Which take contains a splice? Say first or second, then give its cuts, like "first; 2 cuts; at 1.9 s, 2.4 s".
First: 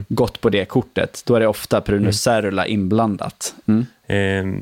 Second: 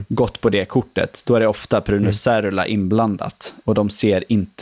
first; 1 cut; at 3.6 s